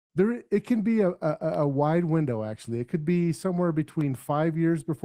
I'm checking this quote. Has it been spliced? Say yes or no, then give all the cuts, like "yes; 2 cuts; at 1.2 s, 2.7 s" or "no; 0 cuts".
no; 0 cuts